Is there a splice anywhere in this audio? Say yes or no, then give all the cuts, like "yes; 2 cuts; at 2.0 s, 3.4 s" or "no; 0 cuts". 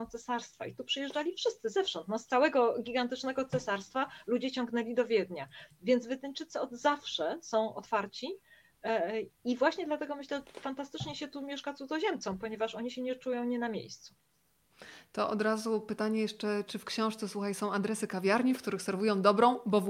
yes; 1 cut; at 9.3 s